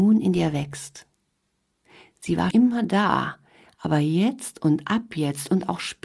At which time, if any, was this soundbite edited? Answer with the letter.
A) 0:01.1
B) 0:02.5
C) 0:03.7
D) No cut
B